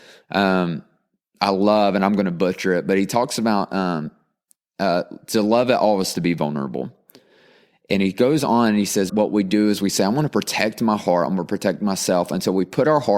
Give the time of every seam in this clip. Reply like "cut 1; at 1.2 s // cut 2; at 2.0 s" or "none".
cut 1; at 9.1 s